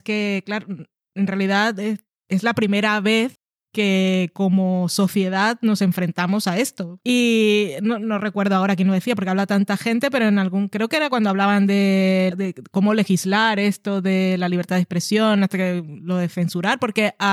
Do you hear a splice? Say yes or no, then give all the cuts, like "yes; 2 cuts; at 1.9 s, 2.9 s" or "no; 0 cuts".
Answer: yes; 2 cuts; at 7.0 s, 12.3 s